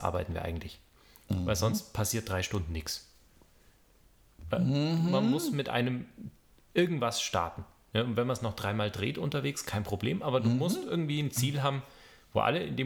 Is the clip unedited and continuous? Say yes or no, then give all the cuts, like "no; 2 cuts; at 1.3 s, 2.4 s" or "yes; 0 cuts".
yes; 0 cuts